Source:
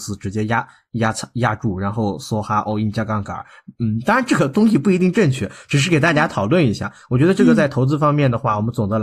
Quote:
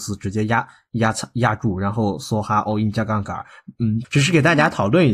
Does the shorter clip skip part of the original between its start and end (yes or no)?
yes